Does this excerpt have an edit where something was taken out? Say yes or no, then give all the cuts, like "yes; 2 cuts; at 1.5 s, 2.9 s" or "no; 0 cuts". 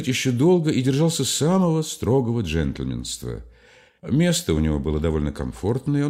no; 0 cuts